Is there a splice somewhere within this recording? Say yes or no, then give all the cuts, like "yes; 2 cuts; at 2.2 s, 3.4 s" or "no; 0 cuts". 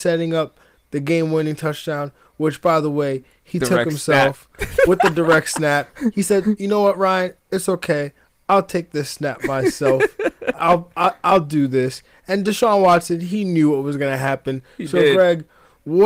no; 0 cuts